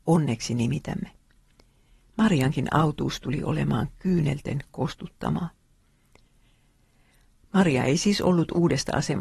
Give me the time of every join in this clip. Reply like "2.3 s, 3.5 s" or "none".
none